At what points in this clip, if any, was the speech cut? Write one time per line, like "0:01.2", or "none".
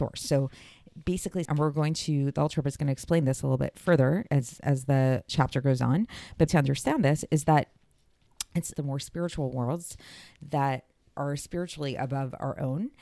0:01.5
0:06.5
0:08.7